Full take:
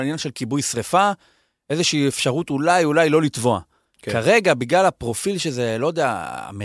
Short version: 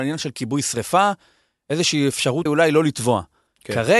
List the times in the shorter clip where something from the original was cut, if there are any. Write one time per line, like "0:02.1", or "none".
0:02.5